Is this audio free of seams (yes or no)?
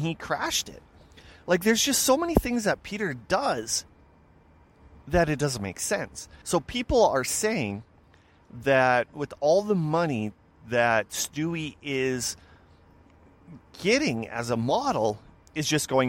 no